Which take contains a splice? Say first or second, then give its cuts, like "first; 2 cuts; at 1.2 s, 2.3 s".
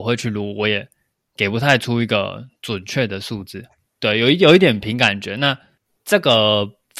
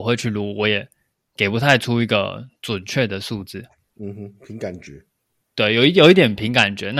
first; 1 cut; at 3.8 s